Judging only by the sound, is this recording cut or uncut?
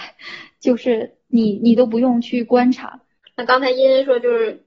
cut